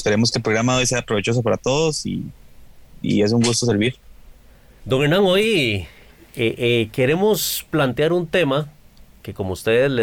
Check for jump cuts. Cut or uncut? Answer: cut